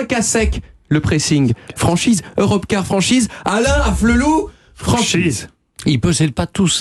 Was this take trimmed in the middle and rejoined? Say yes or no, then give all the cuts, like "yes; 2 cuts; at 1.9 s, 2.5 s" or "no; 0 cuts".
no; 0 cuts